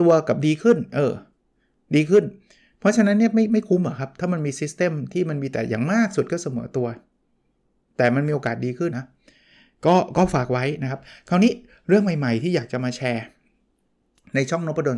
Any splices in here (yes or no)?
yes